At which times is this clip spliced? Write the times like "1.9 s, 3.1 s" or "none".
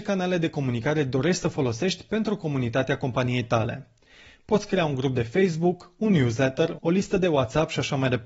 6.8 s